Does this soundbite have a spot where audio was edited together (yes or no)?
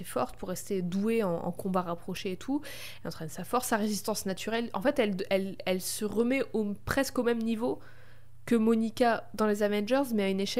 no